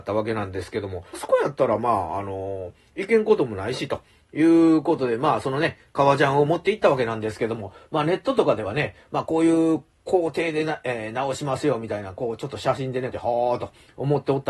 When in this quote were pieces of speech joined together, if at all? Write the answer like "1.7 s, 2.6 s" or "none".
1.1 s, 13.1 s